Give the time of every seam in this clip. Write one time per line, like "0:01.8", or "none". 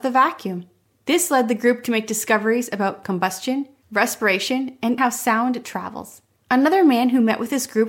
0:05.0
0:06.4